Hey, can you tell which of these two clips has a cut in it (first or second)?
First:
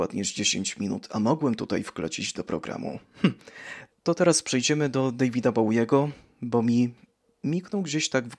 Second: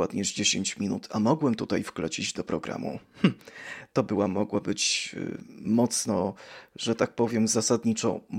first